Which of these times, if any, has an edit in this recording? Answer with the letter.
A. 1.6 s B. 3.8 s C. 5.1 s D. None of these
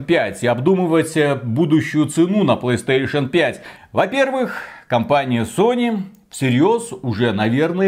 B